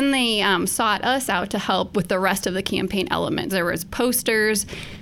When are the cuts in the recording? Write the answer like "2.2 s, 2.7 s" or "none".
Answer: 3.5 s